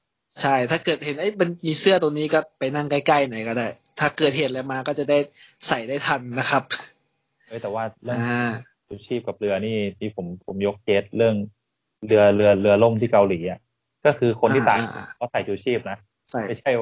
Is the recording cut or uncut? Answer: uncut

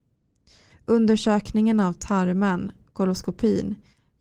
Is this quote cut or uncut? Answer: uncut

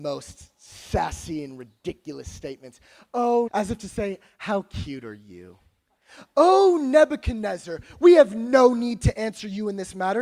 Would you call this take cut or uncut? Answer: cut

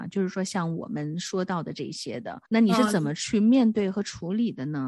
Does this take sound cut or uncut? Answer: cut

